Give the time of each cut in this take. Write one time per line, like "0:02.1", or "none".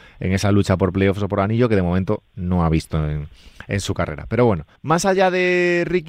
0:04.8